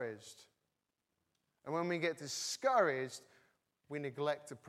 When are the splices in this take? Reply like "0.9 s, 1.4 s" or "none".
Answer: none